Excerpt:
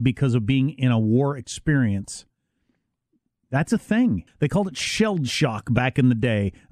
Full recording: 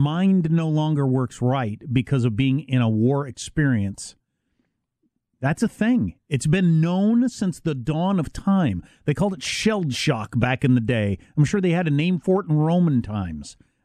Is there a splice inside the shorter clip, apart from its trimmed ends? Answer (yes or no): yes